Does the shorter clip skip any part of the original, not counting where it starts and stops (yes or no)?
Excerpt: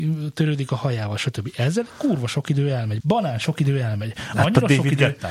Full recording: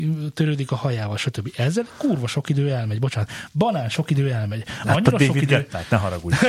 yes